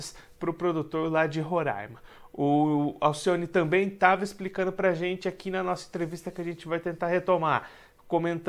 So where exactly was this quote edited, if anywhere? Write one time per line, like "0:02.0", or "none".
none